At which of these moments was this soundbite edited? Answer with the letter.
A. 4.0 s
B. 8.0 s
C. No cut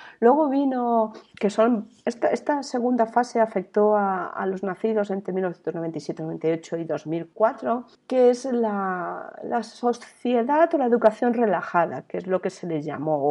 B